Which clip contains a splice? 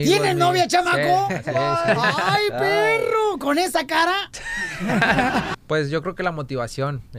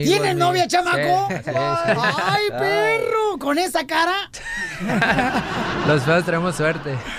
first; 1 cut; at 5.5 s

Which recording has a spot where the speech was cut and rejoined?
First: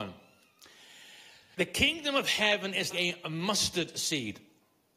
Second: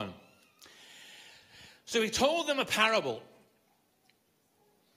first; 2 cuts; at 1.5 s, 2.9 s

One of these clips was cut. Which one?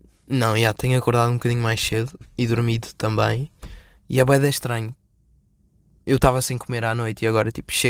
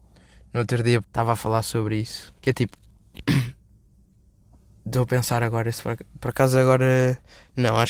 second; 2 cuts; at 1.0 s, 2.4 s

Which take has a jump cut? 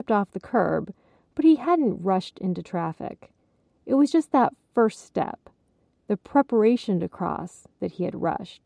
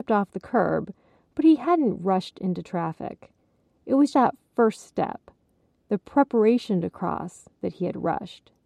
second; 1 cut; at 4.1 s

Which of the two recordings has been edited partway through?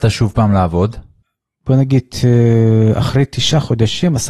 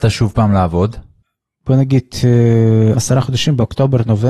second; 1 cut; at 2.9 s

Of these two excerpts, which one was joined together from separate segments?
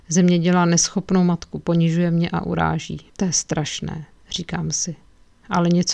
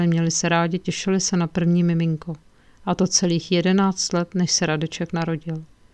first; 1 cut; at 3.1 s

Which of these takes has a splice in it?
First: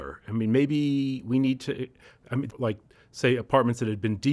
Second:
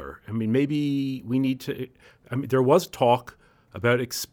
first; 1 cut; at 2.5 s

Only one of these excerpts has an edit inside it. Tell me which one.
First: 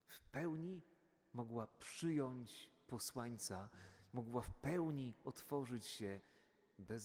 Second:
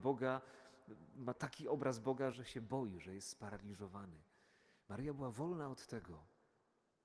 second; 1 cut; at 2.3 s

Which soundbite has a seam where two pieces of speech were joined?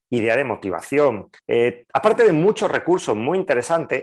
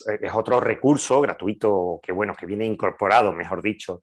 first; 1 cut; at 1.4 s

